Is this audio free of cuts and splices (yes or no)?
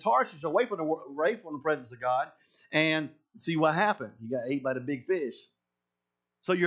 yes